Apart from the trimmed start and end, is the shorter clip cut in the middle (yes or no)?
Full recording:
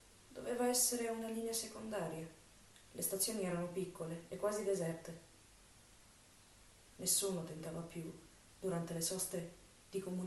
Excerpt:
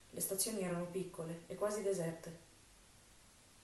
no